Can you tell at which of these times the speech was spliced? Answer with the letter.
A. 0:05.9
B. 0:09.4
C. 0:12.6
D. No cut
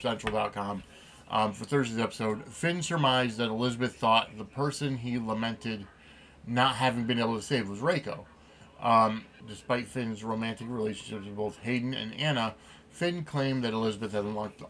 B